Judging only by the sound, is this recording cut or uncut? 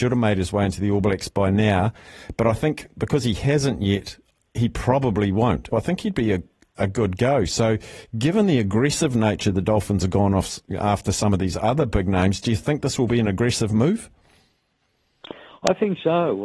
cut